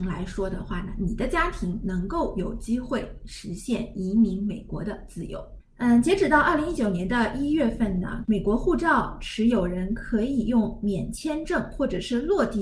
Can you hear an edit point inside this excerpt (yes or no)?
yes